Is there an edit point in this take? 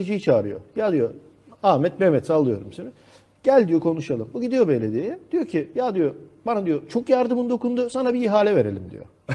no; 0 cuts

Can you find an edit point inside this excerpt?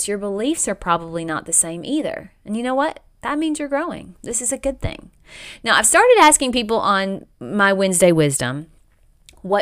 no; 0 cuts

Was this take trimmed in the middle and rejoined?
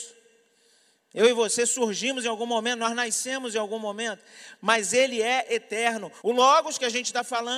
yes; 1 cut; at 6.2 s

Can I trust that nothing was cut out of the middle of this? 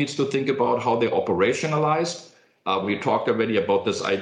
yes; 0 cuts

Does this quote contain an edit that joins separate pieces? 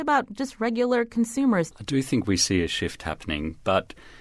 yes; 1 cut; at 1.7 s

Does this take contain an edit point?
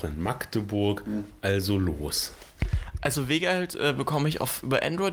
no; 0 cuts

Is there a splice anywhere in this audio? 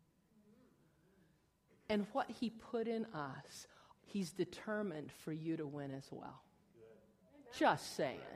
yes; 1 cut; at 4.0 s

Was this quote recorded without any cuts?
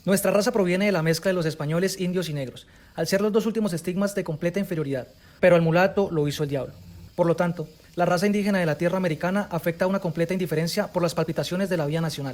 no; 2 cuts; at 5.4 s, 7.1 s

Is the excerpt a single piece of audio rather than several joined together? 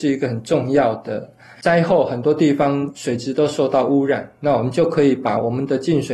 no; 1 cut; at 1.5 s

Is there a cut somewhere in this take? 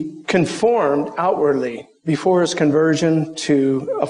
no; 0 cuts

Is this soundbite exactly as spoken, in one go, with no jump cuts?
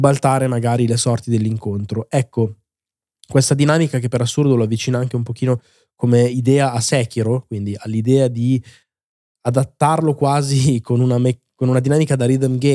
yes; 0 cuts

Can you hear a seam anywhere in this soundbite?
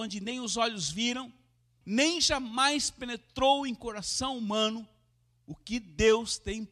yes; 1 cut; at 1.8 s

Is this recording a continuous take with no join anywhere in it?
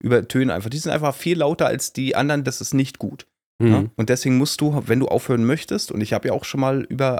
no; 2 cuts; at 2.4 s, 4.0 s

